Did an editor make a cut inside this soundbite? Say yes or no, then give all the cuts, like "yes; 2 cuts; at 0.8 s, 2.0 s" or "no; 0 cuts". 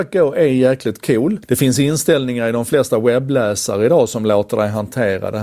yes; 1 cut; at 1.4 s